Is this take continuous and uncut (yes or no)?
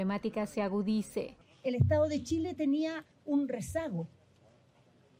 yes